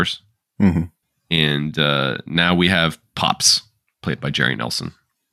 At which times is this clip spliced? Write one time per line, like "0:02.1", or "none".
none